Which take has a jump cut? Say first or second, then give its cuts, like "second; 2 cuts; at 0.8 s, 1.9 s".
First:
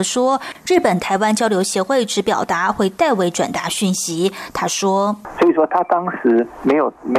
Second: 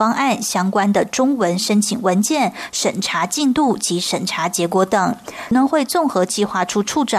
second; 1 cut; at 5.5 s